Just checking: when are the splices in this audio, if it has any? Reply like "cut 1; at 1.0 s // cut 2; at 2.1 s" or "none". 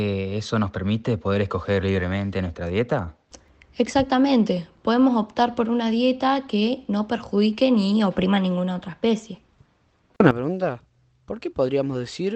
none